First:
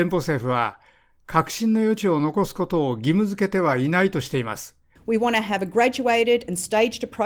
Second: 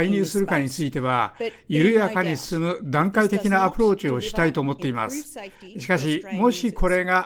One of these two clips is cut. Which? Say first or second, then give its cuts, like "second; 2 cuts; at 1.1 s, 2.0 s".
first; 1 cut; at 5.0 s